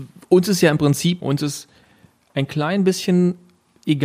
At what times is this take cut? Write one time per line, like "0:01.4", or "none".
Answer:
0:01.2